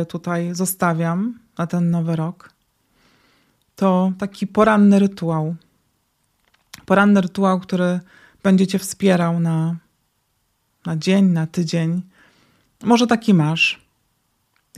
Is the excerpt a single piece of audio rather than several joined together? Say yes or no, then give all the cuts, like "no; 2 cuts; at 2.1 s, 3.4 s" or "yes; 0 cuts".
yes; 0 cuts